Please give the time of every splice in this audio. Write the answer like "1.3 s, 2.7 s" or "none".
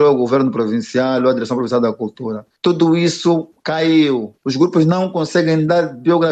4.4 s